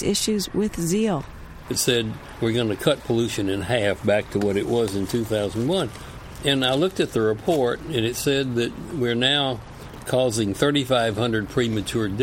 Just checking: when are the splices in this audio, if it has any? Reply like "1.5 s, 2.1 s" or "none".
1.6 s